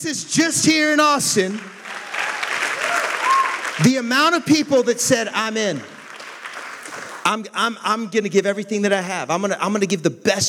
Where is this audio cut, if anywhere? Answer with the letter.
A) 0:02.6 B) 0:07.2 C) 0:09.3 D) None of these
D